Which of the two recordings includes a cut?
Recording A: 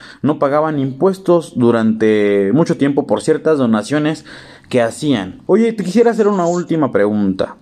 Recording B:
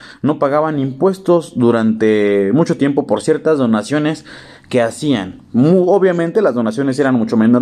A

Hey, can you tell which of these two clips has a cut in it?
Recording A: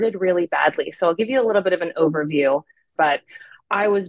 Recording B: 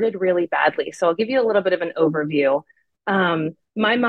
A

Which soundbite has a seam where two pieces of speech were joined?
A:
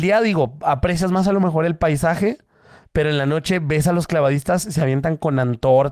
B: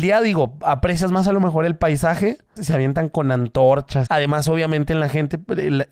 B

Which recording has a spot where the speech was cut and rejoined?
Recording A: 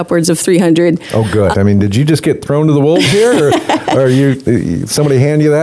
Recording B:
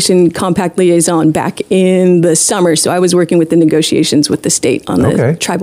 A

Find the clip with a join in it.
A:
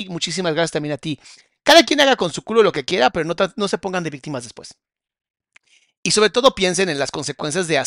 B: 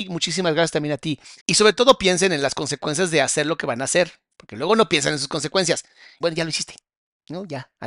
B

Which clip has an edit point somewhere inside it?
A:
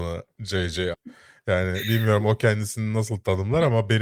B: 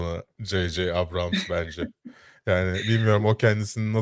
A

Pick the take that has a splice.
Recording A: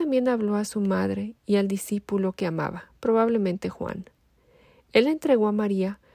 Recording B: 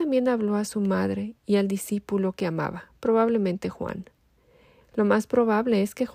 B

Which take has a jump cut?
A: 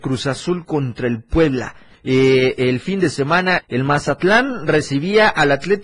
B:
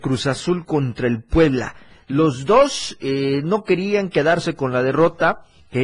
A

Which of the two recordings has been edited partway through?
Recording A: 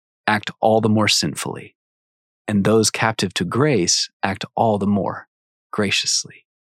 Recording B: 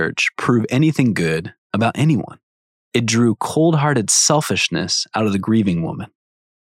B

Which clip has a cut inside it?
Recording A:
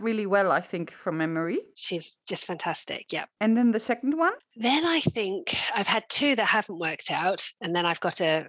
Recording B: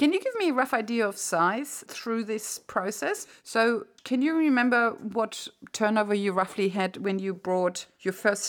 A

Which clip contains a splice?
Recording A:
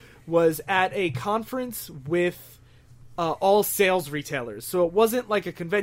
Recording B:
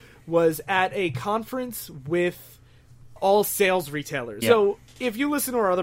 B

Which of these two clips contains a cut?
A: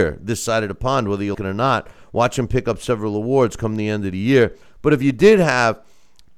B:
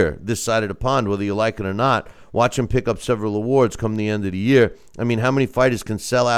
A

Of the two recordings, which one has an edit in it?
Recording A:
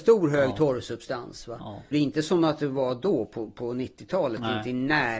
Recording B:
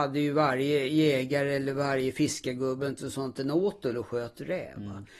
A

